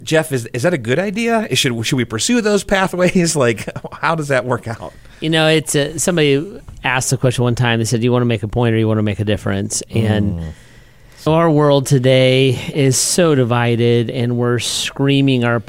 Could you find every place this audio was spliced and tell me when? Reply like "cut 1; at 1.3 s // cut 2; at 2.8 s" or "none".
cut 1; at 11.3 s